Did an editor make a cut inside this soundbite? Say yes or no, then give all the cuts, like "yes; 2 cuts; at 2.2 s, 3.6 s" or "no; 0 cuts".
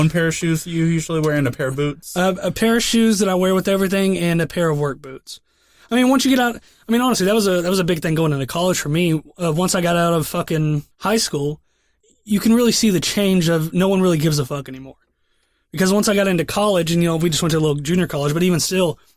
no; 0 cuts